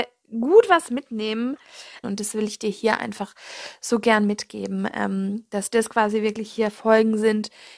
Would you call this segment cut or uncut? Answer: cut